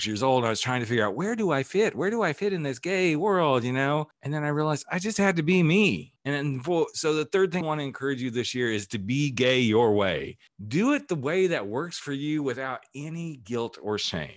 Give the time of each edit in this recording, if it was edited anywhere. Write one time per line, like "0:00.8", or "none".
0:07.6